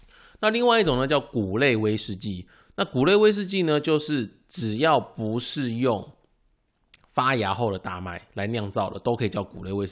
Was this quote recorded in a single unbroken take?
yes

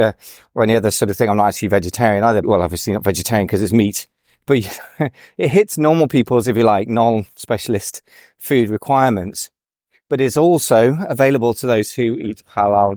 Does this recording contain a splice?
yes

